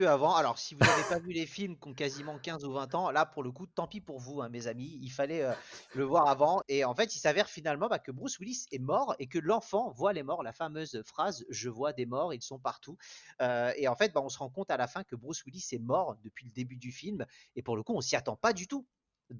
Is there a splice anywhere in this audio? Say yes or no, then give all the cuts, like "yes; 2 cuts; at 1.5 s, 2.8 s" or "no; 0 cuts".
yes; 1 cut; at 6.6 s